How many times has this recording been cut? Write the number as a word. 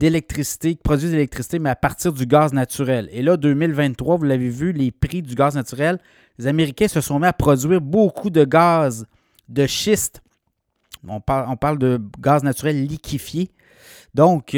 one